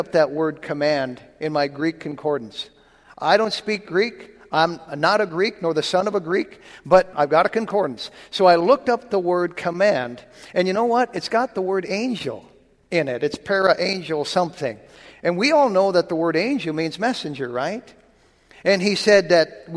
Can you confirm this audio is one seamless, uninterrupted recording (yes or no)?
no